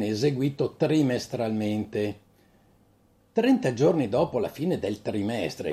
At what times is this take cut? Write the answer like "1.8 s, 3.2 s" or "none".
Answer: none